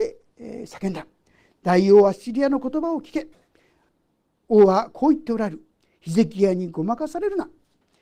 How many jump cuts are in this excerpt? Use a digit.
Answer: 1